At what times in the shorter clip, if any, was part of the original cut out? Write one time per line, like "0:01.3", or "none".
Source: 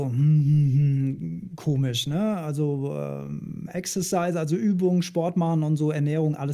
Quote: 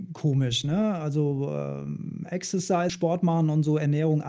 0:02.9